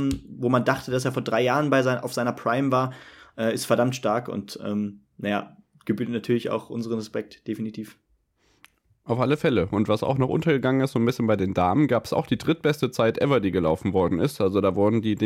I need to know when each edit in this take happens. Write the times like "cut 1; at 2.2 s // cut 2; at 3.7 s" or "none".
none